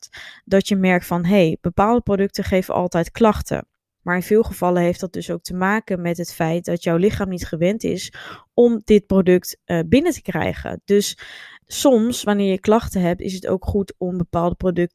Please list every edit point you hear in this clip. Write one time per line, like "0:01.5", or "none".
0:04.0